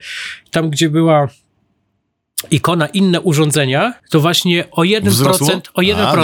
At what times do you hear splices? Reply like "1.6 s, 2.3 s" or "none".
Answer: 4.0 s